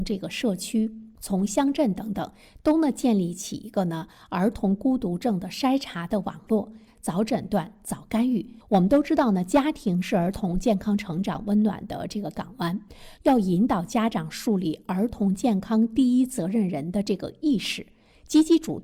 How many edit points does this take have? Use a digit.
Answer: 2